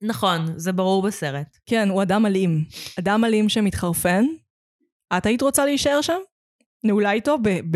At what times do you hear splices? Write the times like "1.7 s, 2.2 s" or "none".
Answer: none